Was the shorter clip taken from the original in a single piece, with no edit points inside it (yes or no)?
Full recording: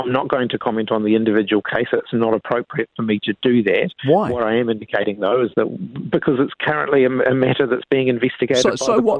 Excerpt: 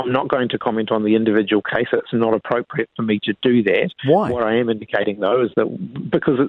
yes